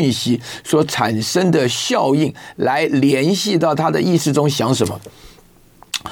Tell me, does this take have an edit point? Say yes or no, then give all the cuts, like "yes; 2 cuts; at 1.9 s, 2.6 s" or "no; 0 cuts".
no; 0 cuts